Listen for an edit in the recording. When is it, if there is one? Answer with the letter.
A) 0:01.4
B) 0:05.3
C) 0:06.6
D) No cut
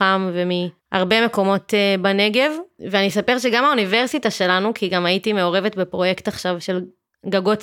C